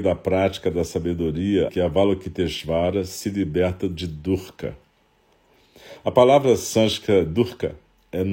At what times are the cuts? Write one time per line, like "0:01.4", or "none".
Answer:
0:01.7